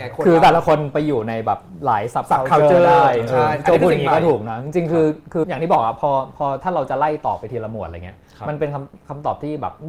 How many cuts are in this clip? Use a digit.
1